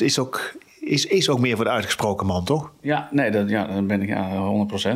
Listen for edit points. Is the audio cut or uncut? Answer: uncut